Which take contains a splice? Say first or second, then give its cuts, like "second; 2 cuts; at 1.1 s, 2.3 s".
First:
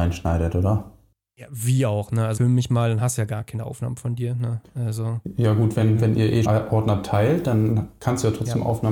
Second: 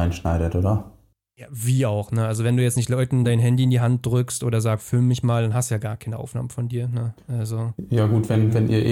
first; 2 cuts; at 2.4 s, 6.4 s